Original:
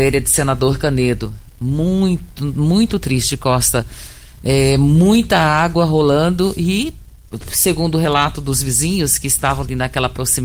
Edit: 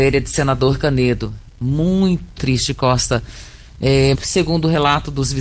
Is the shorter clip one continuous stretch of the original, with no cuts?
no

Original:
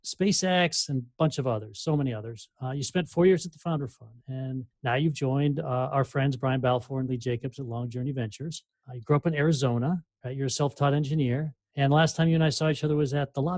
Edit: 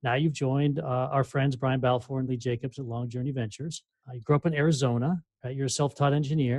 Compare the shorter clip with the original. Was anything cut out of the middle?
no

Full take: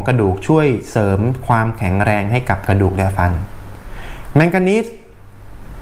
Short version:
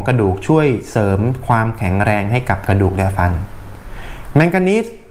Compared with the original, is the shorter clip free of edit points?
yes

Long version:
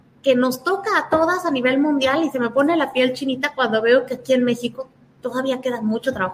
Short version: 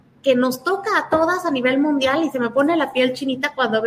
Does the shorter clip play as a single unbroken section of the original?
yes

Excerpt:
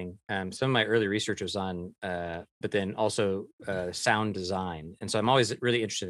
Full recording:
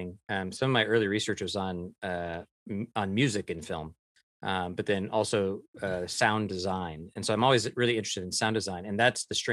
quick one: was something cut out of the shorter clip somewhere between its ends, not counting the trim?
yes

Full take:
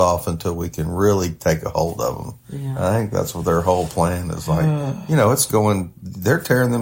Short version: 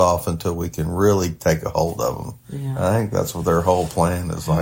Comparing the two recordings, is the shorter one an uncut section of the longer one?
yes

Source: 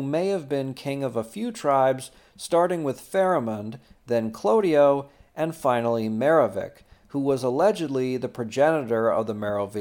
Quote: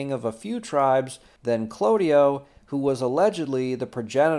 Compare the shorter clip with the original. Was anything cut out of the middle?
yes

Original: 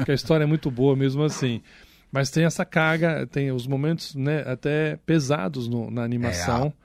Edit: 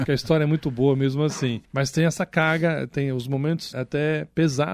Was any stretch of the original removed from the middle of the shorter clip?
yes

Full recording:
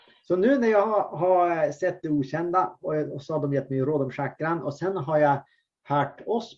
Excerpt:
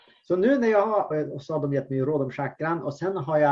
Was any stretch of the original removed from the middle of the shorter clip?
yes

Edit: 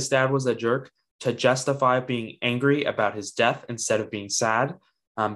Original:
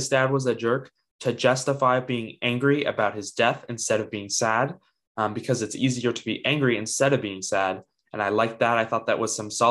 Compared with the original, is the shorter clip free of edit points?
yes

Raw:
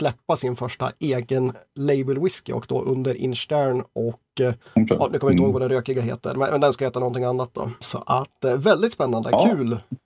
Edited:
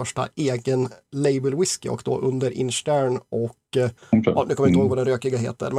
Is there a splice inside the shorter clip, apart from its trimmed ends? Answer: no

